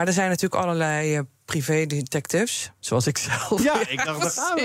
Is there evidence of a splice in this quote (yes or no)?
no